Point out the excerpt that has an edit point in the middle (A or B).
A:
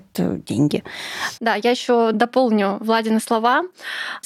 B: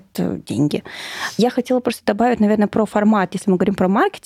A